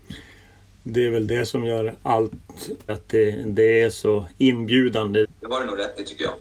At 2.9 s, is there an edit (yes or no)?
yes